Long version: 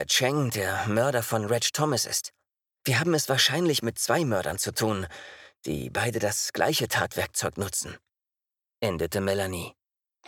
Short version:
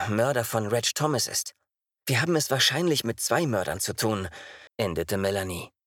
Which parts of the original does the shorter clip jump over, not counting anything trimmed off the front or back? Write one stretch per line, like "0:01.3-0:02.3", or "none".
0:05.5-0:08.7